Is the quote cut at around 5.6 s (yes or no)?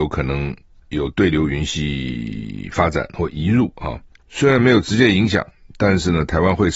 no